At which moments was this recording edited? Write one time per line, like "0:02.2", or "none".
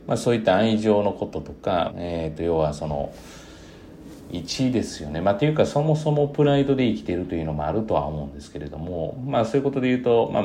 0:01.9

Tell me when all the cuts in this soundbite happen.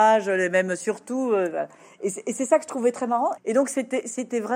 0:03.4

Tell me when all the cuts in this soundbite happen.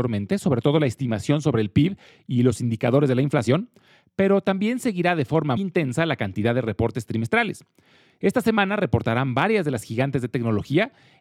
0:05.6

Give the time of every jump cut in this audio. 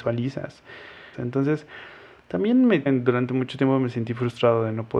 0:01.1
0:02.9

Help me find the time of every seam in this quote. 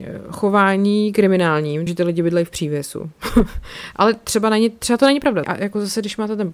0:01.9
0:05.4

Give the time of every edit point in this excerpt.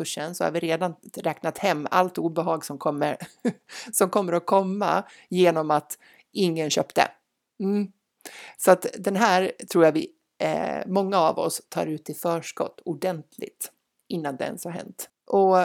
none

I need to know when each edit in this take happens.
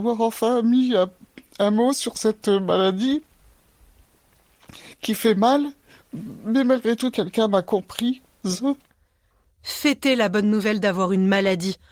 0:07.1

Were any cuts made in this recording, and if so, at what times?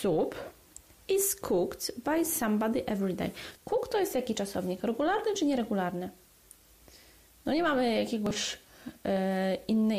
0:03.5

